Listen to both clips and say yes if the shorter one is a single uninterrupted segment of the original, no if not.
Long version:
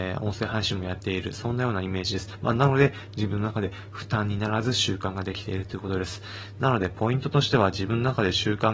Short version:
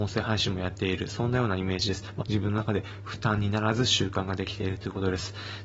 no